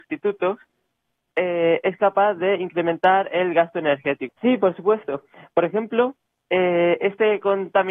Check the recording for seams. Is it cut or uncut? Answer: cut